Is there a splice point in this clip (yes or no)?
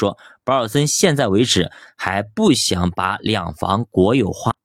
no